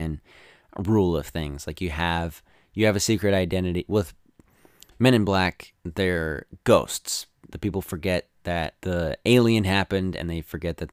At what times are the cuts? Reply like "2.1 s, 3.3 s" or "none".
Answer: 7.5 s, 8.8 s

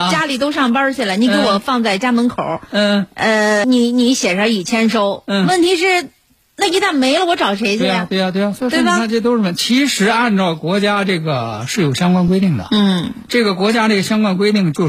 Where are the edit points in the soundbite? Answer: 3.6 s

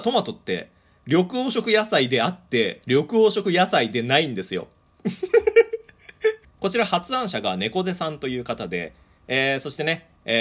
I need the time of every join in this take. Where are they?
6.4 s

